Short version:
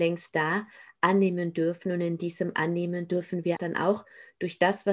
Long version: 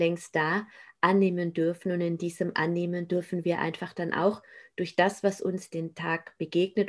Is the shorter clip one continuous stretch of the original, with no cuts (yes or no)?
no